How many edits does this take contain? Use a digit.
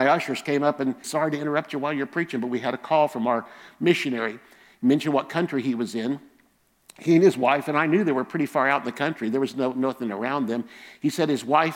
1